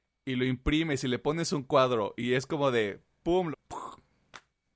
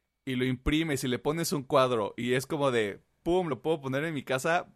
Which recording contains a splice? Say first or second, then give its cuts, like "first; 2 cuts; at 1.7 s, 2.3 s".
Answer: first; 1 cut; at 3.5 s